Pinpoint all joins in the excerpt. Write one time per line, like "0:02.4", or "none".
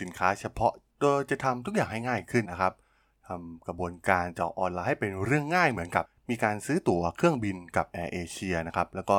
0:02.4